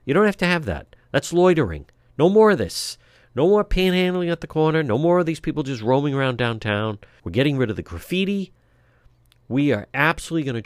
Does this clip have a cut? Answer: yes; 1 cut; at 7.2 s

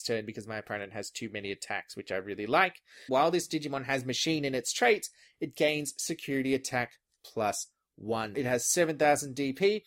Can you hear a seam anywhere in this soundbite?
yes; 2 cuts; at 3.1 s, 8.3 s

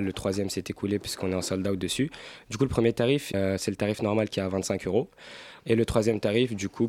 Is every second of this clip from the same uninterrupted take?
no; 2 cuts; at 3.3 s, 5.6 s

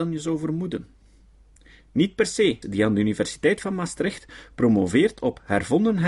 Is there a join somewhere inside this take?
yes; 1 cut; at 2.6 s

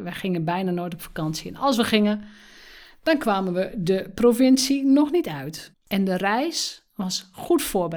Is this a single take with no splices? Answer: no; 1 cut; at 5.7 s

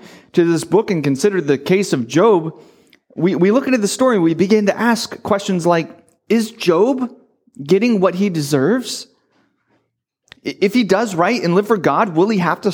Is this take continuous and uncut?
yes; 0 cuts

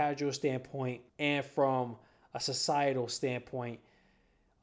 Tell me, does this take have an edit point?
yes; 1 cut; at 1.1 s

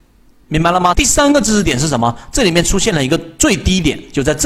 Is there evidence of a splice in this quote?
yes; 1 cut; at 0.9 s

